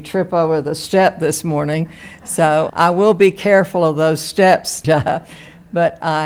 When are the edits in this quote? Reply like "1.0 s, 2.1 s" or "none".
2.7 s, 4.8 s